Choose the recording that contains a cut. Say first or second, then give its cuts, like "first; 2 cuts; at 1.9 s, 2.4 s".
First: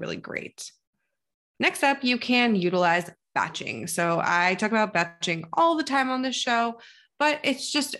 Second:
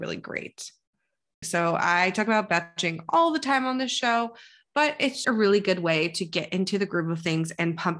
second; 2 cuts; at 1.4 s, 5.2 s